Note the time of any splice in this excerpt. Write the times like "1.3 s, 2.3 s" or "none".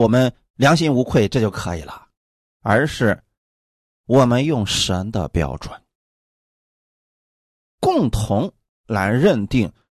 none